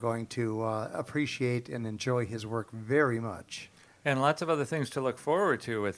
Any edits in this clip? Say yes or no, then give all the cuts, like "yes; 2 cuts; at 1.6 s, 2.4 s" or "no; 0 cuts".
no; 0 cuts